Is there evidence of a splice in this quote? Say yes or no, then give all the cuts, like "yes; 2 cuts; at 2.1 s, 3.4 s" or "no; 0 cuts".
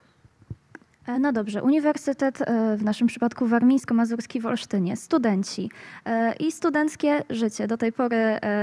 no; 0 cuts